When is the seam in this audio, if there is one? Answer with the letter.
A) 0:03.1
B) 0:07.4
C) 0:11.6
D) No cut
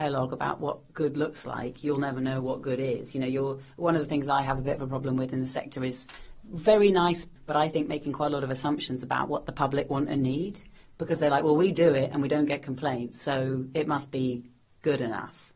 B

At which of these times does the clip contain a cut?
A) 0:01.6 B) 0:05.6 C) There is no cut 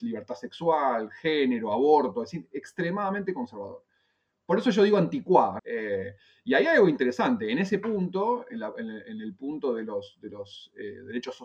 B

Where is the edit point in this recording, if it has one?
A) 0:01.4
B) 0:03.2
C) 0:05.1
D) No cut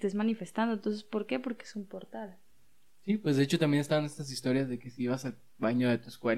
D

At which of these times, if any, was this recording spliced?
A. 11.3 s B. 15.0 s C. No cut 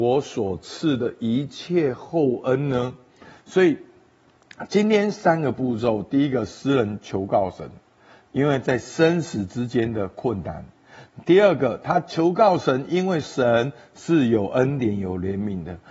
C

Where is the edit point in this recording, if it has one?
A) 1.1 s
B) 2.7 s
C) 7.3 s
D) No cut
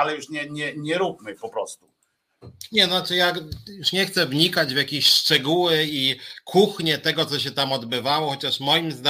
D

